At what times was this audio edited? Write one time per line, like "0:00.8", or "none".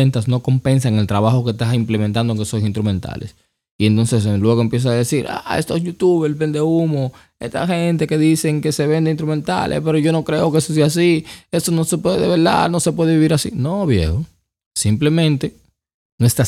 none